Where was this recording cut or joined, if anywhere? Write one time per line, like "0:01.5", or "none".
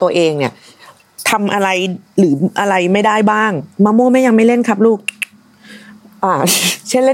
none